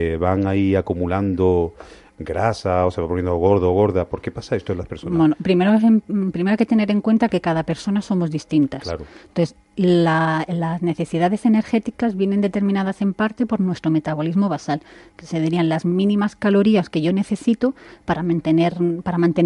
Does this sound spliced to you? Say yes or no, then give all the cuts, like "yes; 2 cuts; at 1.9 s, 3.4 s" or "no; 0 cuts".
no; 0 cuts